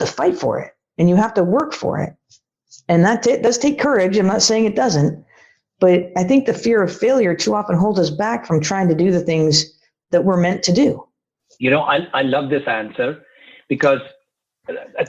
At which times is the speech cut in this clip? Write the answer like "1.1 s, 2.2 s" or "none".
none